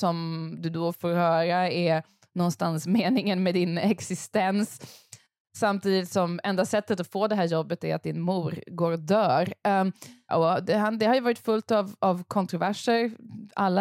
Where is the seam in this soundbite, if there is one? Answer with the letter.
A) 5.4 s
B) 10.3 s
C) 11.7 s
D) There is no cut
B